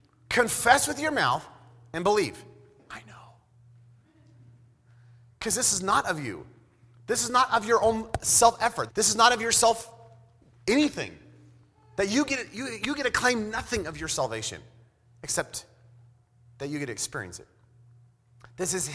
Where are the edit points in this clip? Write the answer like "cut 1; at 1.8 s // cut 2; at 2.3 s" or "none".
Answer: cut 1; at 2.8 s // cut 2; at 8.9 s

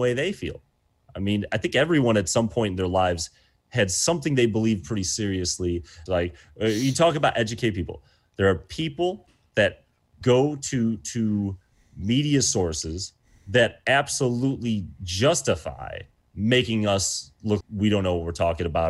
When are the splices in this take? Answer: cut 1; at 6.1 s // cut 2; at 10.2 s // cut 3; at 17.6 s

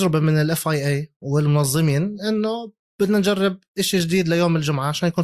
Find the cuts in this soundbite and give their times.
none

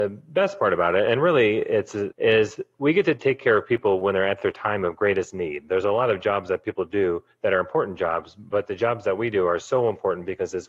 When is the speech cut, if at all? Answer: cut 1; at 2.1 s

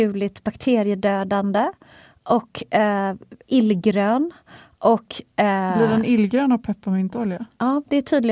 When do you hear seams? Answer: none

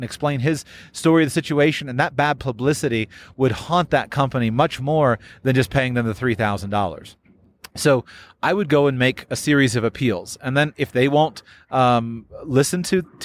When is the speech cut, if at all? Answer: none

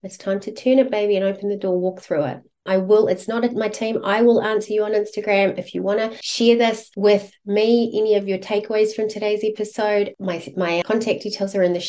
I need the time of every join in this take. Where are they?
cut 1; at 2.7 s // cut 2; at 10.8 s

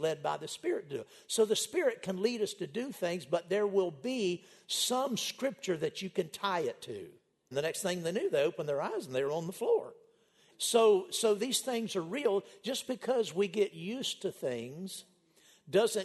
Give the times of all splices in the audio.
cut 1; at 7.5 s // cut 2; at 10.5 s

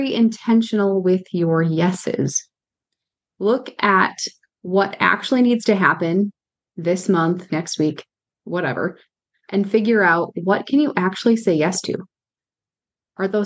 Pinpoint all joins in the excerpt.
cut 1; at 7.5 s

